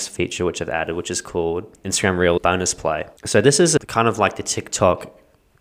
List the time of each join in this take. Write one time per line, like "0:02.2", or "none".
0:03.2